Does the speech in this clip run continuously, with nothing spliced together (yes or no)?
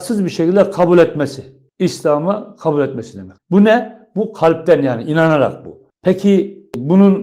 no